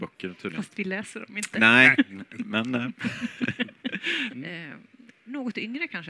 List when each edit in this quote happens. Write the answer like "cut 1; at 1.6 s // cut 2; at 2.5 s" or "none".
cut 1; at 4.3 s